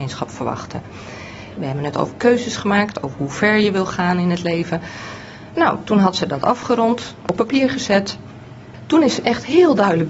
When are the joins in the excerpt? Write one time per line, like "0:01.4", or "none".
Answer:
0:01.6